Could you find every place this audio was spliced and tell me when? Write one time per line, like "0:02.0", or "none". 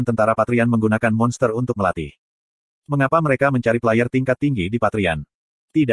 none